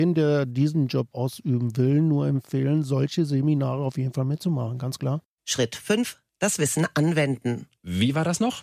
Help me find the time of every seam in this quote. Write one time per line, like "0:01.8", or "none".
none